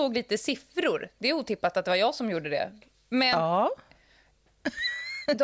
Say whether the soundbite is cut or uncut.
uncut